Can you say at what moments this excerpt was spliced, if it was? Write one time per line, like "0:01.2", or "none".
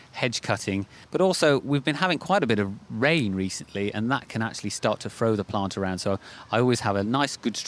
0:01.0